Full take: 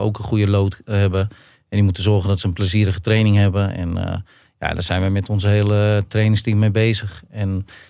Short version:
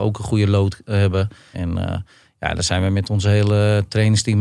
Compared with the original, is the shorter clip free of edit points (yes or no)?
no